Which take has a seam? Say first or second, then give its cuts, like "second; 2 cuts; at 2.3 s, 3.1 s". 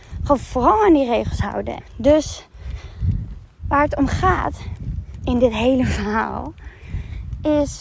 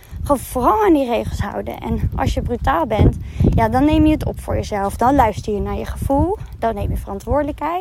first; 1 cut; at 1.8 s